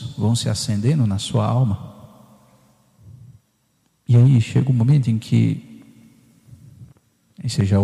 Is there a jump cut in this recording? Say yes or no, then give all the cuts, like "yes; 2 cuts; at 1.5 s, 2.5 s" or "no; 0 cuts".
no; 0 cuts